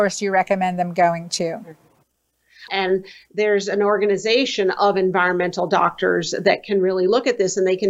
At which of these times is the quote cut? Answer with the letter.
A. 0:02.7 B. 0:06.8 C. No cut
A